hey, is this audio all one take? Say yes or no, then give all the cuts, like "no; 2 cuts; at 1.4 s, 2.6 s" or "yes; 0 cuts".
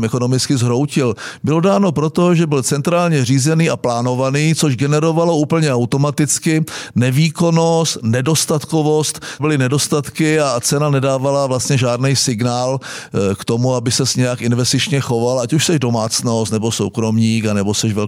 no; 1 cut; at 9.4 s